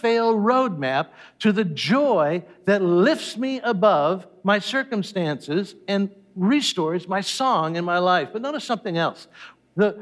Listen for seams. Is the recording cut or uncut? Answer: uncut